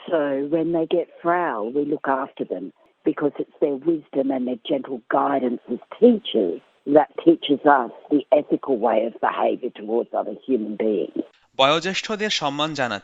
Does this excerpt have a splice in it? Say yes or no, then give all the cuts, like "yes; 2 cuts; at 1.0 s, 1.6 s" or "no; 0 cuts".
no; 0 cuts